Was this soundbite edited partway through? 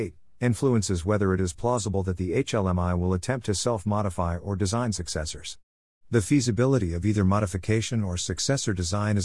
no; 0 cuts

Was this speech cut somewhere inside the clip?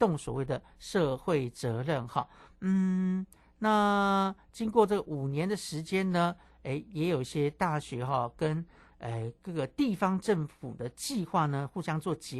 no; 0 cuts

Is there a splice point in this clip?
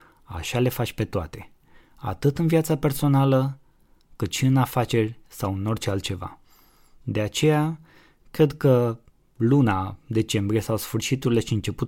no; 0 cuts

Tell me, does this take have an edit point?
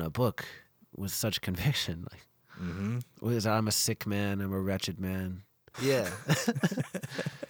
yes; 1 cut; at 5.7 s

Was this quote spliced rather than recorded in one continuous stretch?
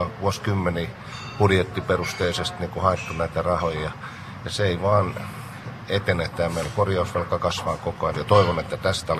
yes; 1 cut; at 8.1 s

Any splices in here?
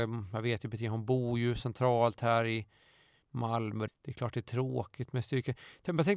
yes; 1 cut; at 3.9 s

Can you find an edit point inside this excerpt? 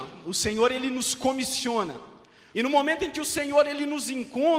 yes; 1 cut; at 2.5 s

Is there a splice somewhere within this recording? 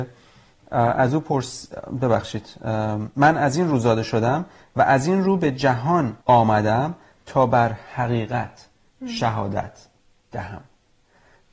yes; 1 cut; at 6.2 s

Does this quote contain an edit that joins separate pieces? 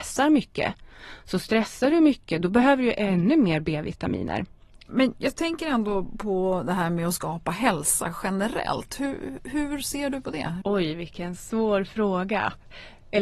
yes; 2 cuts; at 4.9 s, 10.6 s

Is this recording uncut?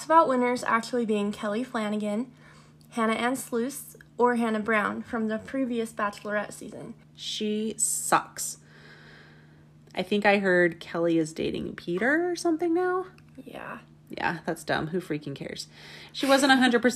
no; 2 cuts; at 7.0 s, 9.8 s

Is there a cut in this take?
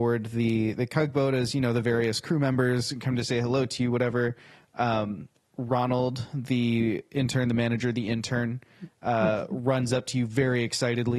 no; 0 cuts

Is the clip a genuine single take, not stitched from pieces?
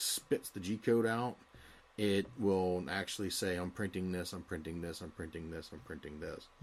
yes; 0 cuts

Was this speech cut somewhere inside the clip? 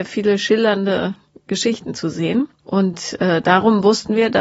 no; 0 cuts

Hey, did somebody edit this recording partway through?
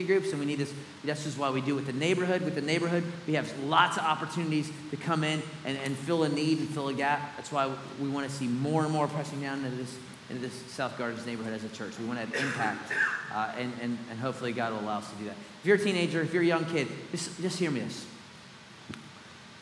no; 0 cuts

